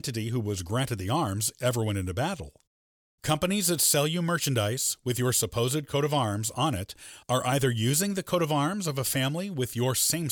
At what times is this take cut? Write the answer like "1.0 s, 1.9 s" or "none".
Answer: 3.1 s